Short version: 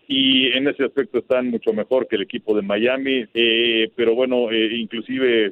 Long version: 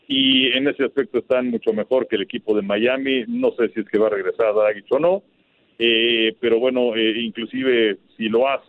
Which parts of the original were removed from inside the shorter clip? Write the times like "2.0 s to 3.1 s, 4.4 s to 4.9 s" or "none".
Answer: 3.2 s to 5.7 s